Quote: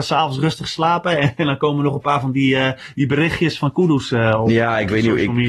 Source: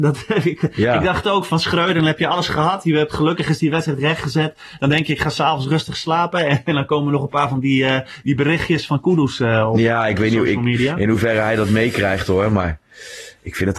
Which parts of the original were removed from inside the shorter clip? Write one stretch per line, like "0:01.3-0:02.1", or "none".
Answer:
none